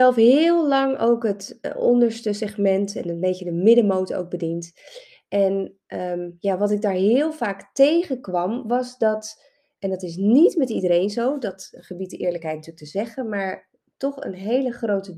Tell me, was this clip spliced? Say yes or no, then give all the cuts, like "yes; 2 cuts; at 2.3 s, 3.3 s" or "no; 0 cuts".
no; 0 cuts